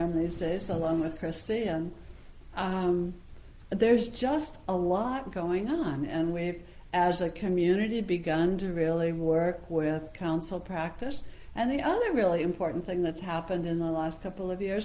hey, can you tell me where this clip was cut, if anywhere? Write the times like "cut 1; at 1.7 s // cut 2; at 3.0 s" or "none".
none